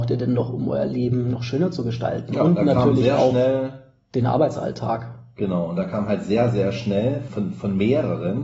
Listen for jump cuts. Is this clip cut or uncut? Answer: cut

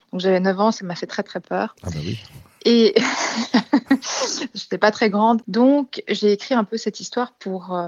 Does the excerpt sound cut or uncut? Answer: cut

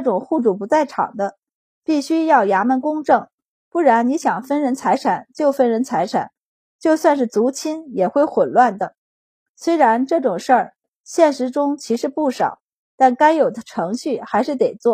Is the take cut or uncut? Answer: uncut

